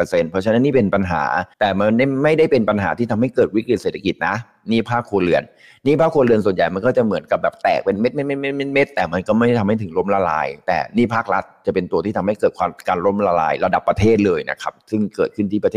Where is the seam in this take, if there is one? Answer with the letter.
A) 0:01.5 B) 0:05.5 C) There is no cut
A